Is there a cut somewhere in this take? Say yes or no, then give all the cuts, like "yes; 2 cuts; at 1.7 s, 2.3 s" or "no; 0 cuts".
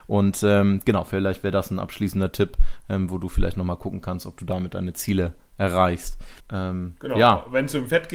yes; 1 cut; at 6.4 s